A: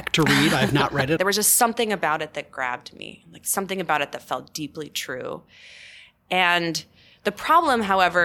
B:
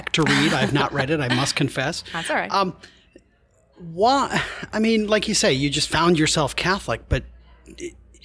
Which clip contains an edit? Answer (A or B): A